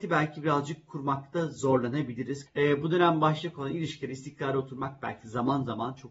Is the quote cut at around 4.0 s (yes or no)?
no